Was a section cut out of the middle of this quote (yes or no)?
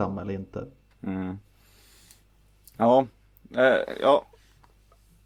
no